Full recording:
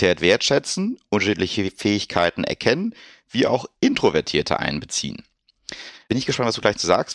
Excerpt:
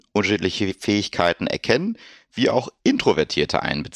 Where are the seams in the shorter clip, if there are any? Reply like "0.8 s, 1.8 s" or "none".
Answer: none